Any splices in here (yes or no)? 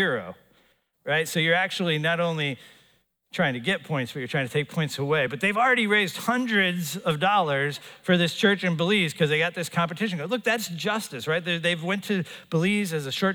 no